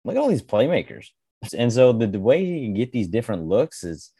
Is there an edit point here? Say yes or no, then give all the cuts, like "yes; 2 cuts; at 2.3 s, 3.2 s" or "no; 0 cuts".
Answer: yes; 1 cut; at 1.5 s